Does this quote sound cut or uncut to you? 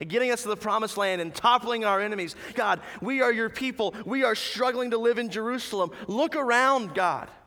cut